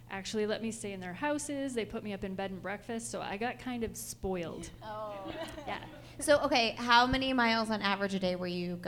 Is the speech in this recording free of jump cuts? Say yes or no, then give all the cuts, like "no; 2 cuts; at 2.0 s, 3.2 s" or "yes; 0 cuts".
yes; 0 cuts